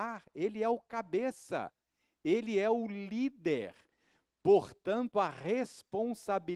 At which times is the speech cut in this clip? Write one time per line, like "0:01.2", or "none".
none